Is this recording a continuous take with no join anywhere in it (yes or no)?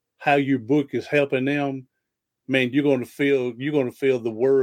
yes